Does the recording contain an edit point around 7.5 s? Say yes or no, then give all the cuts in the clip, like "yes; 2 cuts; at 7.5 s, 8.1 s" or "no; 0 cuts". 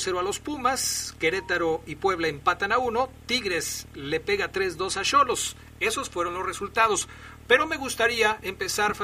yes; 1 cut; at 7.5 s